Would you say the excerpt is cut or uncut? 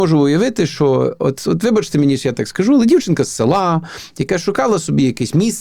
uncut